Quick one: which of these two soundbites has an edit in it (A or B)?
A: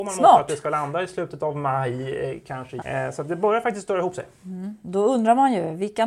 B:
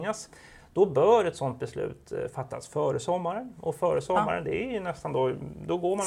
A